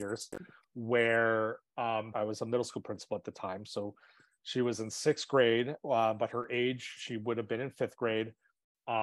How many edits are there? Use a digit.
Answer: 1